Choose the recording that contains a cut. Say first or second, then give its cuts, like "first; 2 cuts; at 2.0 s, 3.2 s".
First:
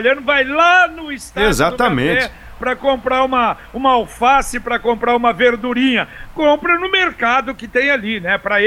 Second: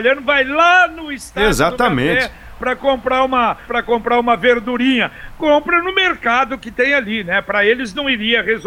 second; 1 cut; at 3.7 s